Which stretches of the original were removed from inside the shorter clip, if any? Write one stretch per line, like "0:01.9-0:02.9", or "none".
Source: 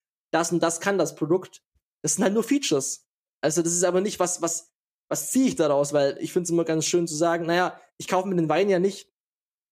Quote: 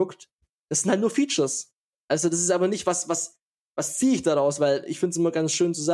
none